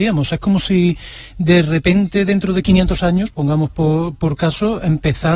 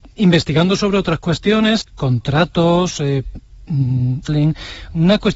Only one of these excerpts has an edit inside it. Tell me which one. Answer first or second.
second